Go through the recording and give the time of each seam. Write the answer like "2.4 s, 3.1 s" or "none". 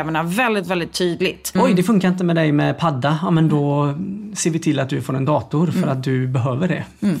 1.6 s